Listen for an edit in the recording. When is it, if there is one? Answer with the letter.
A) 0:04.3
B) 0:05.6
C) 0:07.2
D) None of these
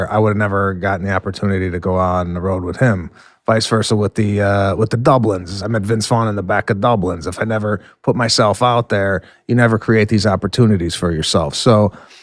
D